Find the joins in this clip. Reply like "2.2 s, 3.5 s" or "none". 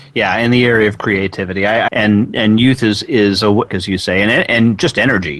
1.9 s, 3.7 s